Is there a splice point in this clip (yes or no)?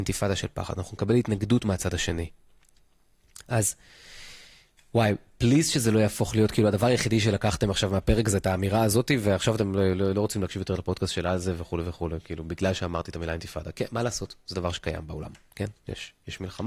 no